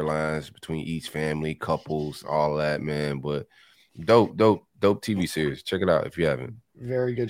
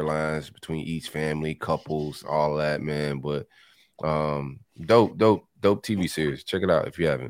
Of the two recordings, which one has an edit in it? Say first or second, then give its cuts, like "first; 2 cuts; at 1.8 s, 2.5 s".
first; 1 cut; at 3.9 s